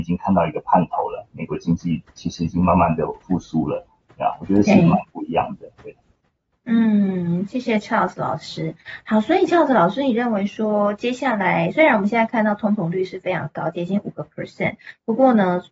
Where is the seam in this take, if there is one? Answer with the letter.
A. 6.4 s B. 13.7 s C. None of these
C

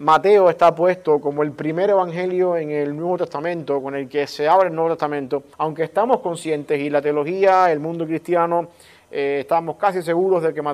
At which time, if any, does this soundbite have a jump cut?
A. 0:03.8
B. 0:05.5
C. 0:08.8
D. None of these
B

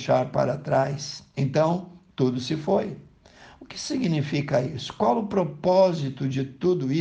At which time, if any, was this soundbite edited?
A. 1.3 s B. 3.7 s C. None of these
A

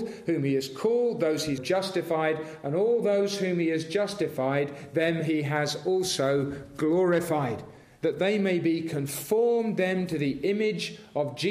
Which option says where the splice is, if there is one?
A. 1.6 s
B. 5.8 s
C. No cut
A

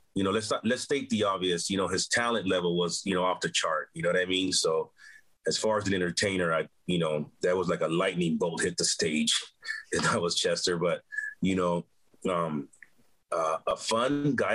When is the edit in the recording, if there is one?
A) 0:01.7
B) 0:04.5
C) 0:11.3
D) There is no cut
D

